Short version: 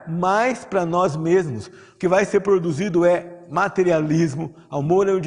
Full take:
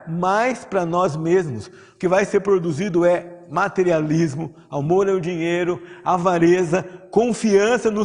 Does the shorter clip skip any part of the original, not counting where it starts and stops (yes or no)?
no